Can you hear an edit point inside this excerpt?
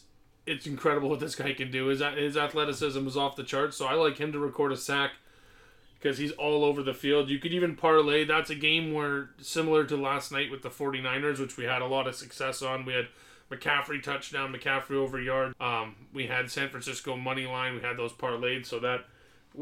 yes; 1 cut; at 15.5 s

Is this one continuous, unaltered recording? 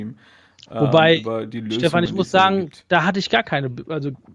yes; 0 cuts

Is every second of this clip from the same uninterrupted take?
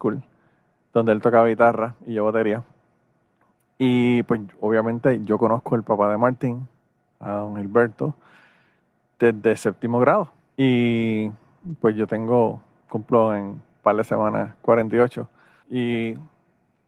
no; 2 cuts; at 10.6 s, 15.6 s

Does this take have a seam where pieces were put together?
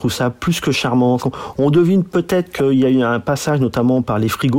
yes; 1 cut; at 1.2 s

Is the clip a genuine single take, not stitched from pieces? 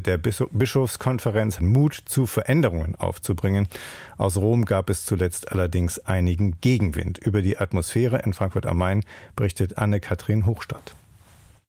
no; 1 cut; at 1.6 s

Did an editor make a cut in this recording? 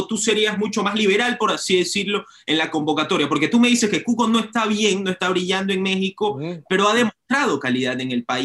no; 0 cuts

